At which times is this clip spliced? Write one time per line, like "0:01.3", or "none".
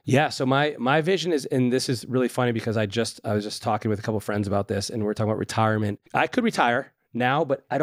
0:06.1